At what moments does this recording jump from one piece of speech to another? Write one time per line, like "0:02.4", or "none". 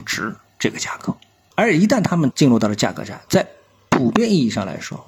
0:01.5
0:03.3